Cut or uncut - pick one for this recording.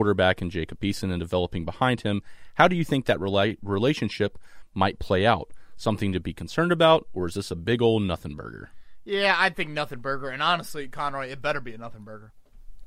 uncut